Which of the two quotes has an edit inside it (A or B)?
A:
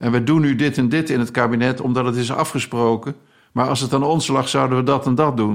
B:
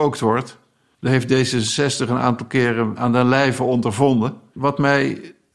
B